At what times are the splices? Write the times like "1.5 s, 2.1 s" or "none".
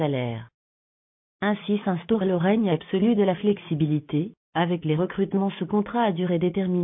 none